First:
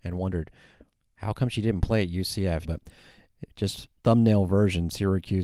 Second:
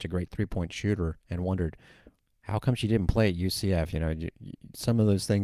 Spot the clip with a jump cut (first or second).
first